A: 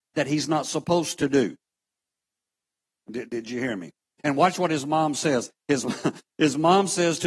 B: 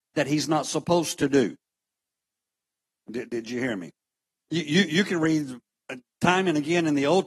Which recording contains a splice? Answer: A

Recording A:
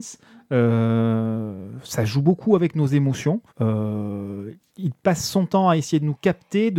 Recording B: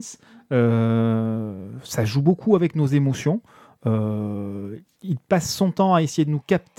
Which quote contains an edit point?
A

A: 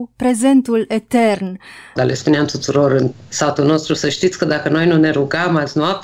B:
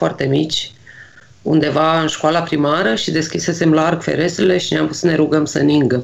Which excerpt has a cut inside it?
A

